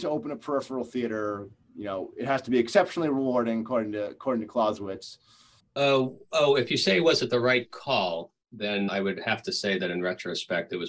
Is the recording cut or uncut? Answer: cut